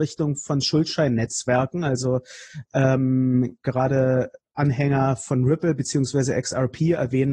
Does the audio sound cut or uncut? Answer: uncut